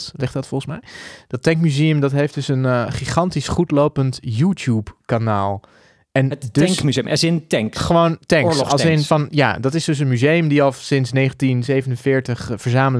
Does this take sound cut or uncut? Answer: uncut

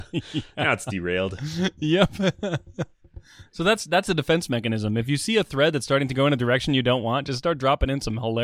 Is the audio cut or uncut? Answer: uncut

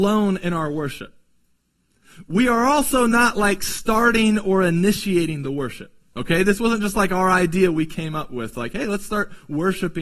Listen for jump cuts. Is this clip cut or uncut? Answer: uncut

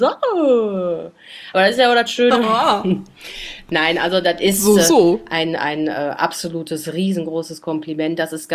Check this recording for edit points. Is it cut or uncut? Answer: uncut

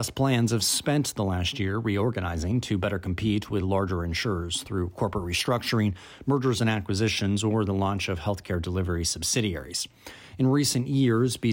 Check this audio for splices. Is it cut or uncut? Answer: uncut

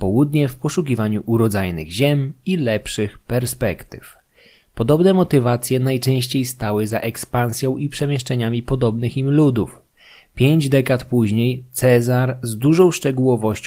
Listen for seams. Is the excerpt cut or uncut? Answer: uncut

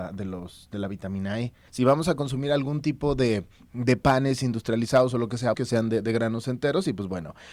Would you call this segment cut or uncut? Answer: cut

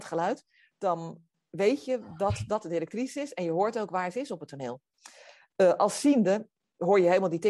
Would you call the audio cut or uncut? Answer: uncut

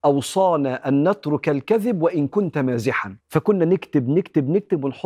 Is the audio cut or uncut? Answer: cut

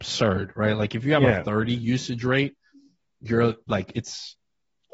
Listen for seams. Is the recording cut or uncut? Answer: uncut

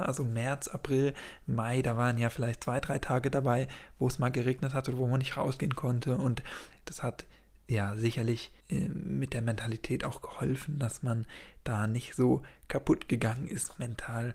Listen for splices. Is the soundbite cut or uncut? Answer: cut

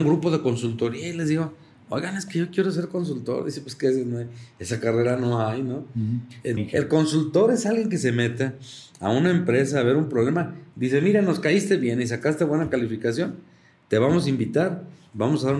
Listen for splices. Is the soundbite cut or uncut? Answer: cut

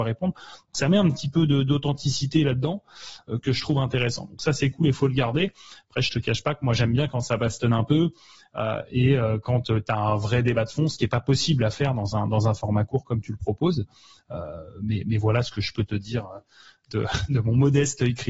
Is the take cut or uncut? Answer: uncut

